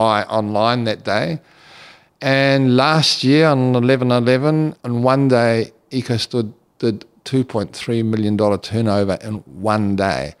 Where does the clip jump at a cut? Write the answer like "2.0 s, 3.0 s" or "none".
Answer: none